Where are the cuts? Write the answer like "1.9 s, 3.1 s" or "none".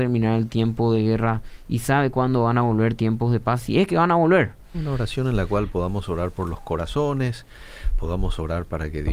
4.7 s